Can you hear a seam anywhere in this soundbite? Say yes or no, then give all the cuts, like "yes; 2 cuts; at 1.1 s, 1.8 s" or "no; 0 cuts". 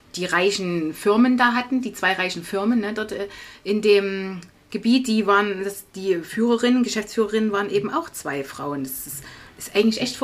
no; 0 cuts